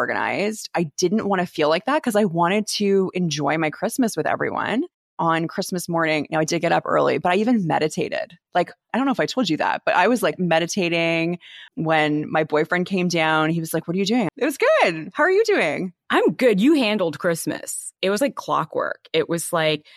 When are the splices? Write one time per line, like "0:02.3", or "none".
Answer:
0:11.7
0:14.3